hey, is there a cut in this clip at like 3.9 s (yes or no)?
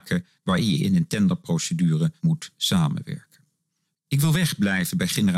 yes